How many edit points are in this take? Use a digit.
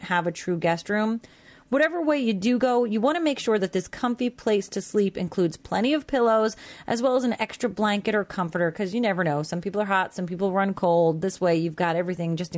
0